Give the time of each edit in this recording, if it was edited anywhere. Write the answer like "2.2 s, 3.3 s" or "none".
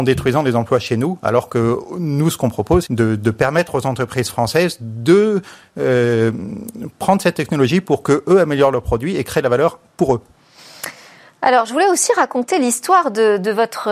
2.9 s

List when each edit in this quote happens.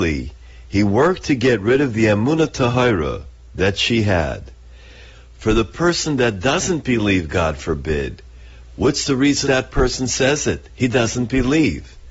5.1 s, 9.4 s

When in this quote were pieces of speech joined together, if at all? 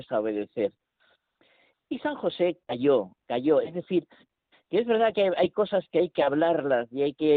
none

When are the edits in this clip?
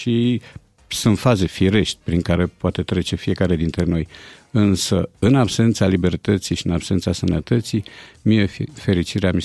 none

